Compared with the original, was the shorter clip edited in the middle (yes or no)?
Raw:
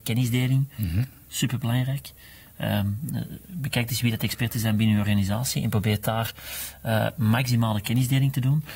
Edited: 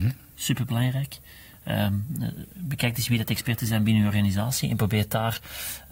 no